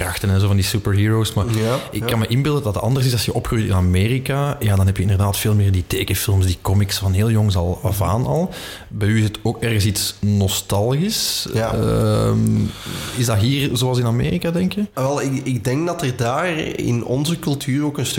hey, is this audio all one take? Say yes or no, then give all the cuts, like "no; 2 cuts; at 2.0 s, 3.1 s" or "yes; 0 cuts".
yes; 0 cuts